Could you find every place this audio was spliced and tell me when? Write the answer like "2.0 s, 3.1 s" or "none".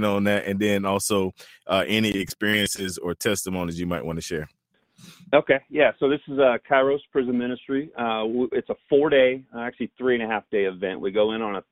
none